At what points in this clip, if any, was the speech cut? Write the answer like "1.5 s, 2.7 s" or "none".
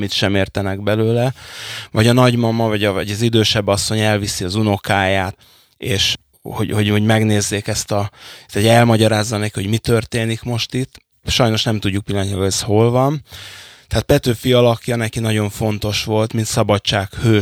11.2 s, 16.3 s